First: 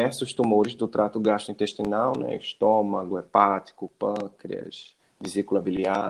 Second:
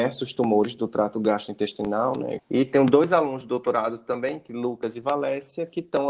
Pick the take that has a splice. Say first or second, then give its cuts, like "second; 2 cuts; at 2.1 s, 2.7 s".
second; 1 cut; at 2.4 s